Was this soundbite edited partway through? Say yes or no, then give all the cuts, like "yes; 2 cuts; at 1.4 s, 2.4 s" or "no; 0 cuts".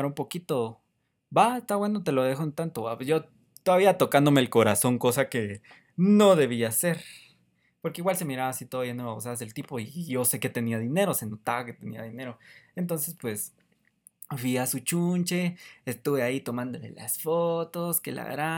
no; 0 cuts